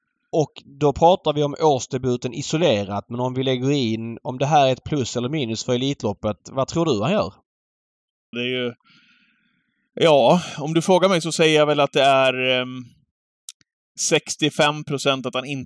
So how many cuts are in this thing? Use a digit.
1